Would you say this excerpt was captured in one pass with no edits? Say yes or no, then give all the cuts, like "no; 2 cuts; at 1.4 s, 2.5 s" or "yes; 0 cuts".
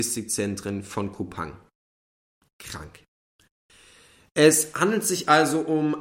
yes; 0 cuts